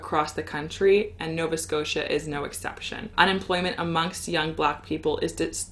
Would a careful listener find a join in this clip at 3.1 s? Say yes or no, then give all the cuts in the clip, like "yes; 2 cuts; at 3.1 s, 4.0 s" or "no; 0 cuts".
yes; 1 cut; at 3.1 s